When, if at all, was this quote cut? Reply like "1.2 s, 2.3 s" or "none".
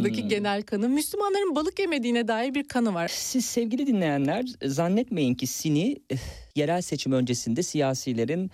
3.1 s, 6.5 s